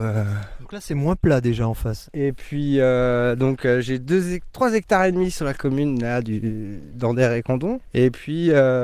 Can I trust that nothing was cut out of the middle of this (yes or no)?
no